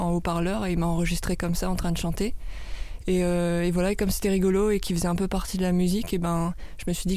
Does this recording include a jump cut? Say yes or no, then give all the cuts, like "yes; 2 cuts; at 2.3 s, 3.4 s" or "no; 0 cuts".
no; 0 cuts